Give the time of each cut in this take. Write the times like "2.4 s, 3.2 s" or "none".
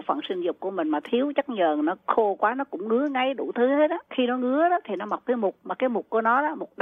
4.1 s